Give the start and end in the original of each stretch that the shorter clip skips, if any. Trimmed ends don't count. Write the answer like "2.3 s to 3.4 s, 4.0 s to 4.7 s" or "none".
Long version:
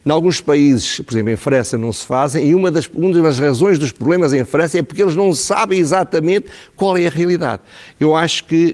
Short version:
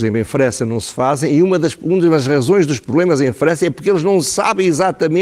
none